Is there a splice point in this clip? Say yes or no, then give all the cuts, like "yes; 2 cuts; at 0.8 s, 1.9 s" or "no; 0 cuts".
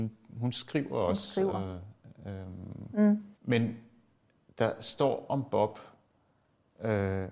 yes; 1 cut; at 3.4 s